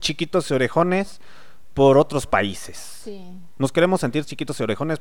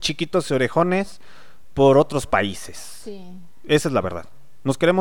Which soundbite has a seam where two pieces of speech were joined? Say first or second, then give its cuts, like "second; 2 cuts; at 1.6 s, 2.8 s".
first; 1 cut; at 3.6 s